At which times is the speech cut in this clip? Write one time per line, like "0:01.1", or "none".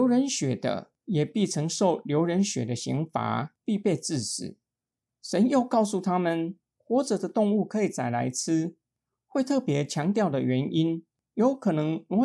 0:05.1